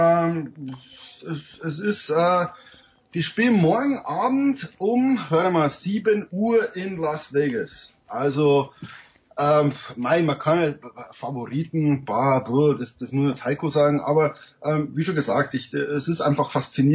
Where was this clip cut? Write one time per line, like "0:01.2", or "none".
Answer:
none

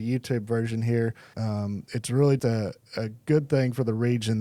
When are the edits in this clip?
0:01.3
0:02.4

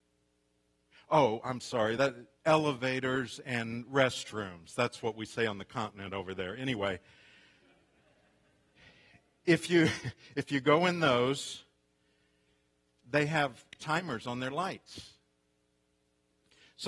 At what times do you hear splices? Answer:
none

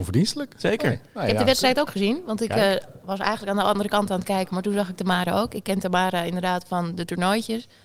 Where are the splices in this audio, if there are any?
none

